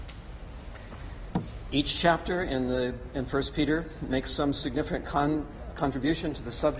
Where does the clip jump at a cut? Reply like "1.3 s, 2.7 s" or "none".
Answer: 5.7 s